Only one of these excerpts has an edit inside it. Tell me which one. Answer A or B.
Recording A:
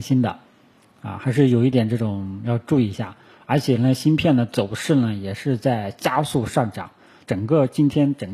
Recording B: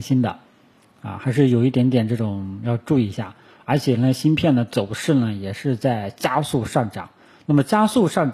A